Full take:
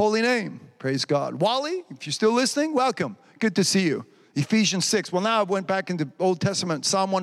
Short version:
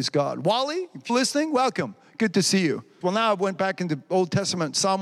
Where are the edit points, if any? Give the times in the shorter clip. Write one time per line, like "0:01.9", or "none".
0:01.1
0:03.0